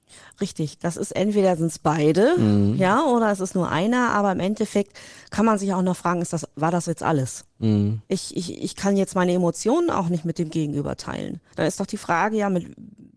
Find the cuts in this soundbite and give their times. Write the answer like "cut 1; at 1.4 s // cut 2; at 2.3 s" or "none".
cut 1; at 8.0 s // cut 2; at 11.5 s